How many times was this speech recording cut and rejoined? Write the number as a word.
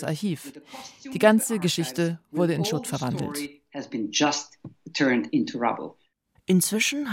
zero